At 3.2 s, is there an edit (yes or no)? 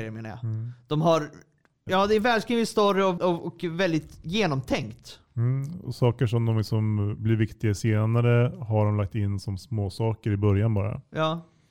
yes